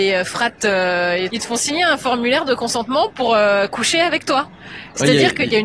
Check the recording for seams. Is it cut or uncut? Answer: cut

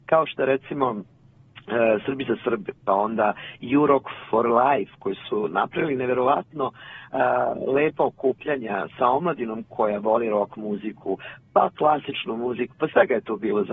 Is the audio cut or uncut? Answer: uncut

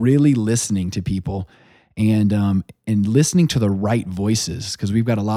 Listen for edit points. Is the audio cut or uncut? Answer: uncut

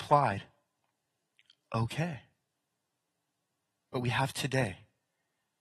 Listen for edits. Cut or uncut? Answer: uncut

